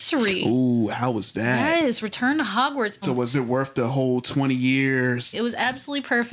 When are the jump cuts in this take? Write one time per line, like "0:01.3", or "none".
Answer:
0:03.0
0:05.3